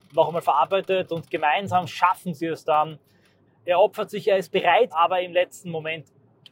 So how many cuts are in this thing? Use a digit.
2